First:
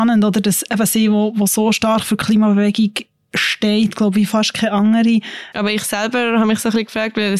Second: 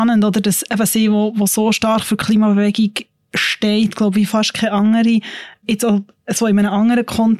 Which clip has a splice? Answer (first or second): first